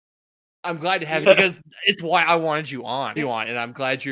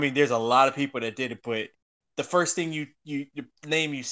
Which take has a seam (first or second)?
first